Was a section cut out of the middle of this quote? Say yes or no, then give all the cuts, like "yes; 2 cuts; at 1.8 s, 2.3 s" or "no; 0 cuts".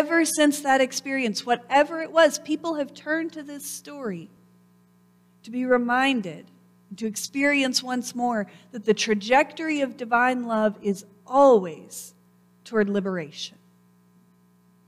no; 0 cuts